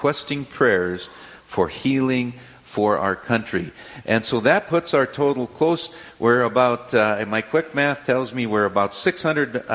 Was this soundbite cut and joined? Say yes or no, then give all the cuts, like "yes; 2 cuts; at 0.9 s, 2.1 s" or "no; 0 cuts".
yes; 1 cut; at 4.0 s